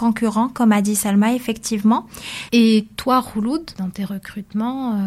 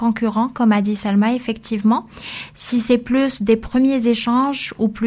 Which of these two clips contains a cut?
first; 2 cuts; at 2.5 s, 3.7 s

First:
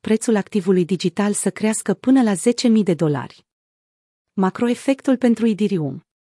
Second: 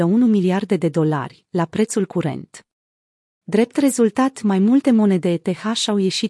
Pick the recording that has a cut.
second; 1 cut; at 3.4 s

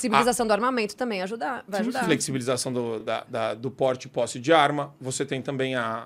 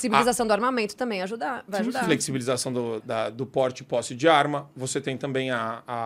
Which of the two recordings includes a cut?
second; 1 cut; at 3.0 s

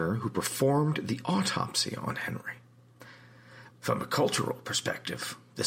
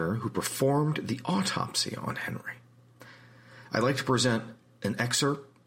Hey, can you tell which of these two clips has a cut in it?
first; 1 cut; at 3.7 s

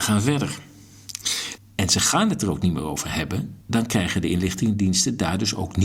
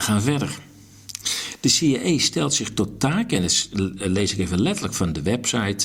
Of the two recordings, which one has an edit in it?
first; 2 cuts; at 1.6 s, 3.6 s

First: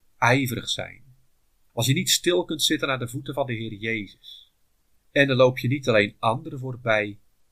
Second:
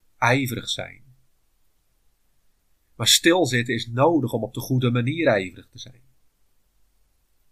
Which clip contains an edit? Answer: first; 2 cuts; at 1.7 s, 5.0 s

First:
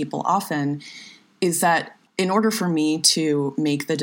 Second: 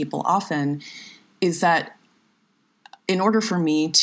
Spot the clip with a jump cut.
first; 1 cut; at 2.1 s

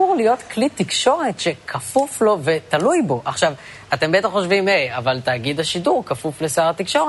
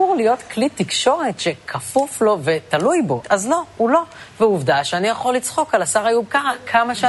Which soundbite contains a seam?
second; 1 cut; at 3.2 s

